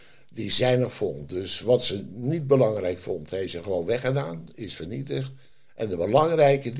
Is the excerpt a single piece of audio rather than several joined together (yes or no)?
yes